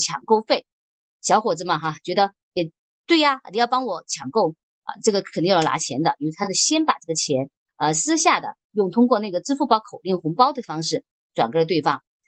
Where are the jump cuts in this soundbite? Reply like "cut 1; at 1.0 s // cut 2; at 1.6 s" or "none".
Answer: none